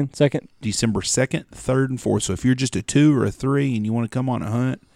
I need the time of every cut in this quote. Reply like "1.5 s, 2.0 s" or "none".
none